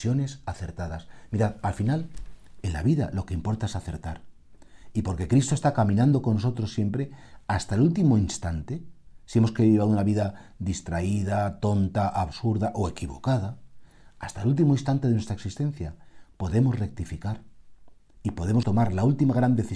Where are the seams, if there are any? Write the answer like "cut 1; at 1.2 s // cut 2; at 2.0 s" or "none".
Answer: cut 1; at 18.6 s